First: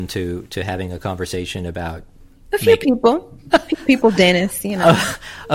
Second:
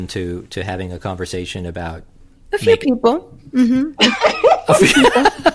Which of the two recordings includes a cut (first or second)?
first